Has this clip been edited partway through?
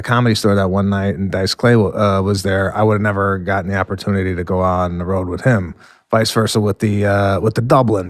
no; 0 cuts

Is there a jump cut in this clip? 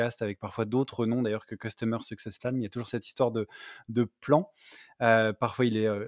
no; 0 cuts

